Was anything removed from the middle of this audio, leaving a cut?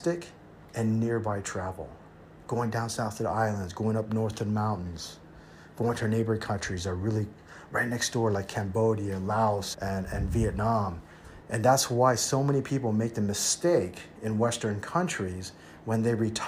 yes; 2 cuts; at 9.7 s, 11.4 s

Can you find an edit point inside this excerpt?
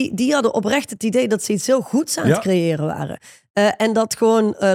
no; 0 cuts

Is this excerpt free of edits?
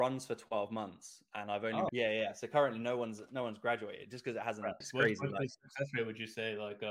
no; 2 cuts; at 1.9 s, 4.8 s

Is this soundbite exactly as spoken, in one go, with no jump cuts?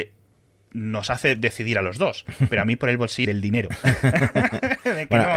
no; 1 cut; at 3.3 s

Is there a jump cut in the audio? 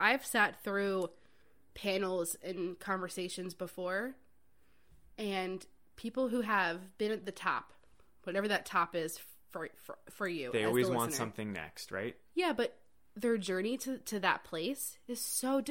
no; 0 cuts

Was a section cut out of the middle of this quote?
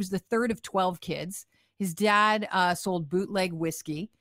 no; 0 cuts

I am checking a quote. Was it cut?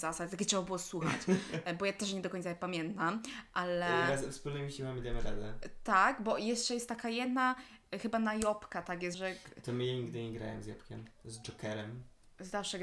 yes; 1 cut; at 9.1 s

